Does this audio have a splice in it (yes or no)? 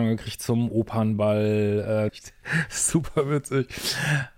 yes